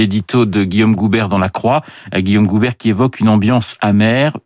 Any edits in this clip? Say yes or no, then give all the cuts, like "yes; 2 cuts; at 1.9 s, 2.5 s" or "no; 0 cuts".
no; 0 cuts